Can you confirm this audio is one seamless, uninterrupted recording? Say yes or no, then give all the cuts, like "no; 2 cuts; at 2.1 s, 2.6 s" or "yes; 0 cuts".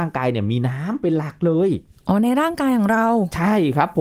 yes; 0 cuts